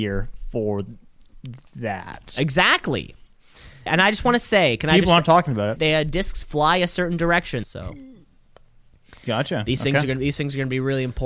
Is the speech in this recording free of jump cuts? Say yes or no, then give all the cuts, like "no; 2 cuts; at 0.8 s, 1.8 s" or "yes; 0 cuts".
no; 3 cuts; at 3.9 s, 5.8 s, 7.6 s